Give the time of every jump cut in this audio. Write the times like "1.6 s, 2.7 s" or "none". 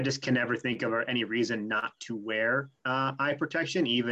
2.8 s